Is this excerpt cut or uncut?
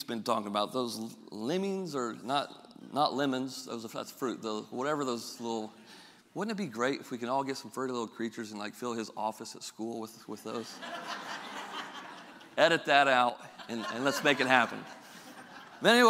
uncut